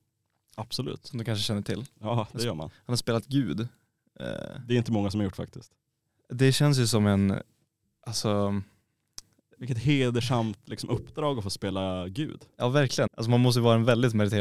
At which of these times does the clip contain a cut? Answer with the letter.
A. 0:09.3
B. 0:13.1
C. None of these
B